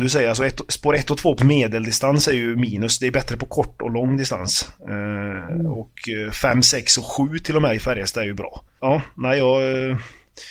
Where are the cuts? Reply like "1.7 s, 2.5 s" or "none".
1.4 s, 8.8 s